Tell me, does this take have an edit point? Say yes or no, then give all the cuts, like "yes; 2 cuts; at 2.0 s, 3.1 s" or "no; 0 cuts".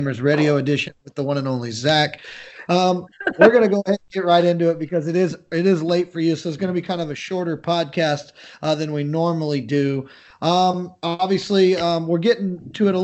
no; 0 cuts